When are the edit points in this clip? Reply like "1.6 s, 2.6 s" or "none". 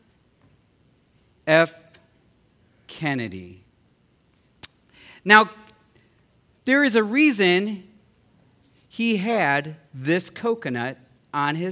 none